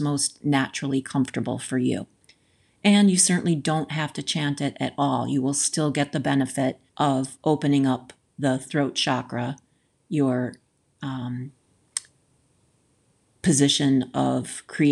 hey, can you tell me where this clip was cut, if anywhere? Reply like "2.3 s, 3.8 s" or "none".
6.9 s